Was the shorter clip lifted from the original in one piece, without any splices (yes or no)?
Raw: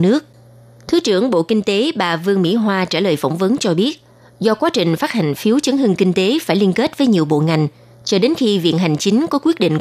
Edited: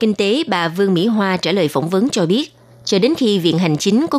no